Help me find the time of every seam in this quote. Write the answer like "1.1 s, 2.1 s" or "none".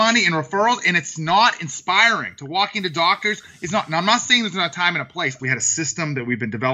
5.4 s